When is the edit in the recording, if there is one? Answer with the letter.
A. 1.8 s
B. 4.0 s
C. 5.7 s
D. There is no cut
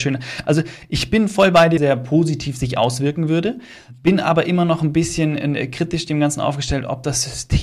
A